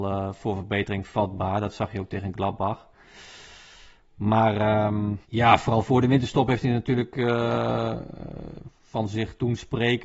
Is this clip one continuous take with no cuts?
no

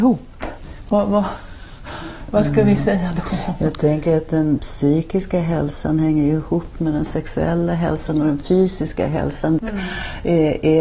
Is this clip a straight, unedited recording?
no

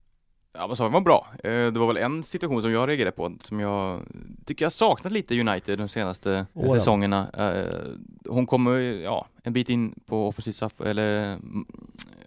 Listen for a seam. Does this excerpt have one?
yes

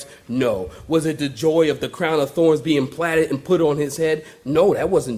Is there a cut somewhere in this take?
no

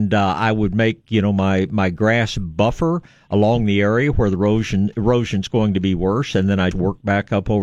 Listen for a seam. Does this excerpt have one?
yes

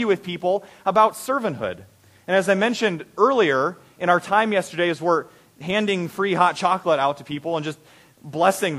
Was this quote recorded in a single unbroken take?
yes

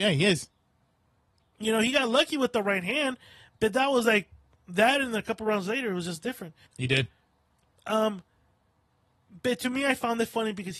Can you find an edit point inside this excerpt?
yes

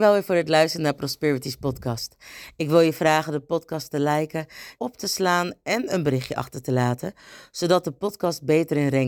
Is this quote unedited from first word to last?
no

